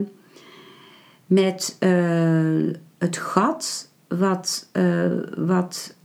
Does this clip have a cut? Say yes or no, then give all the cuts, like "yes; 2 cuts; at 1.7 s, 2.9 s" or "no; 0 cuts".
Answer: no; 0 cuts